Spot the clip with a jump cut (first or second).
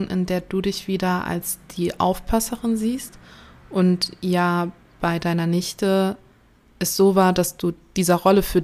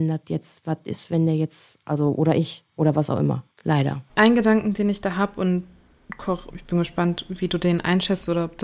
second